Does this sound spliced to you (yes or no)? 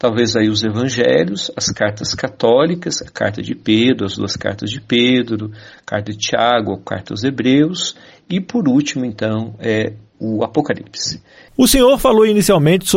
yes